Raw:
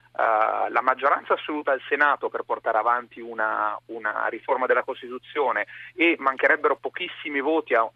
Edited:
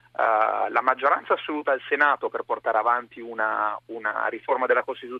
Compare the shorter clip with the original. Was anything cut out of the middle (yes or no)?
no